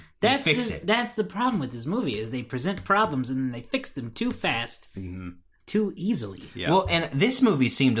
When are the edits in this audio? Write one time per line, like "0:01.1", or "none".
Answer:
none